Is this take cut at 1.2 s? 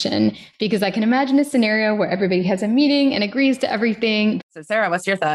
no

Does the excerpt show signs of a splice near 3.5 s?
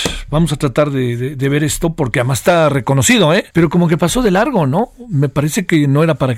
yes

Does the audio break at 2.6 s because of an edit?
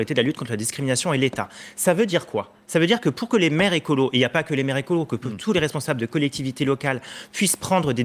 yes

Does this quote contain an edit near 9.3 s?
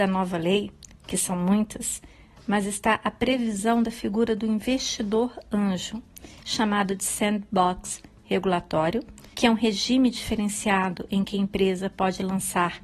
yes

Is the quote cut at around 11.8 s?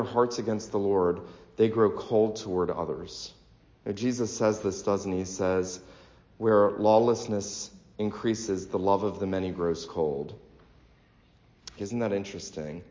yes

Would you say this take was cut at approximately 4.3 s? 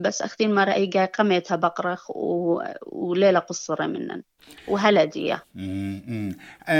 no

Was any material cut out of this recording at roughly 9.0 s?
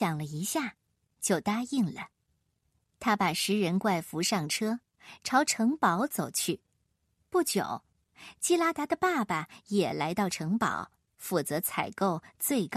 no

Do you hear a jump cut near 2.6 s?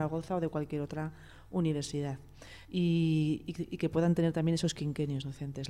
yes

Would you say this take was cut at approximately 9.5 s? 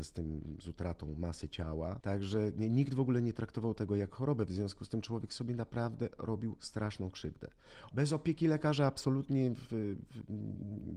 no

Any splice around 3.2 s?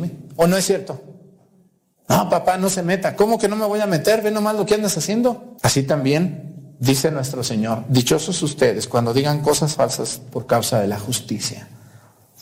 no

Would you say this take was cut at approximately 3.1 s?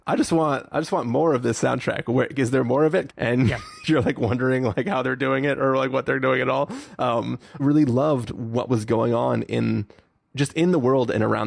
yes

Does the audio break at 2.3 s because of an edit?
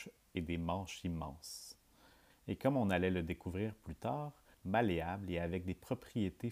yes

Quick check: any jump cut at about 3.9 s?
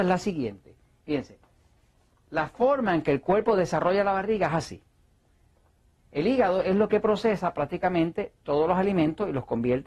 no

